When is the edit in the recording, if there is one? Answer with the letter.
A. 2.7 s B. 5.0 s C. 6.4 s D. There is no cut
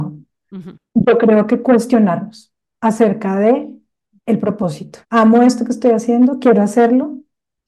B